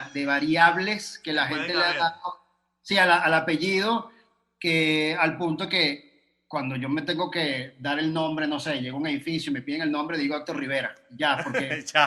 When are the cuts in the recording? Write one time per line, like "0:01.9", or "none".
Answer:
none